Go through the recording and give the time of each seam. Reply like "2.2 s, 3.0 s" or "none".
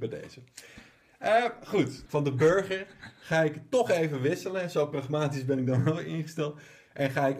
2.1 s